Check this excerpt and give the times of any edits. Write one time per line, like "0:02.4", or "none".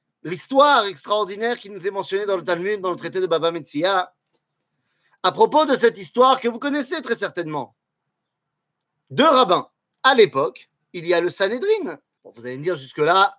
0:09.9
0:12.2